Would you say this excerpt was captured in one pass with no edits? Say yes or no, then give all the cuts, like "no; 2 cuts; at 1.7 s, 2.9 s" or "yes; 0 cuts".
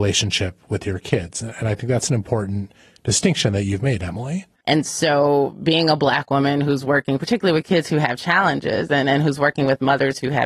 no; 1 cut; at 4.5 s